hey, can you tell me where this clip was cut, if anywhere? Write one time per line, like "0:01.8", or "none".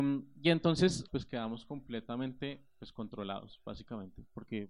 0:01.1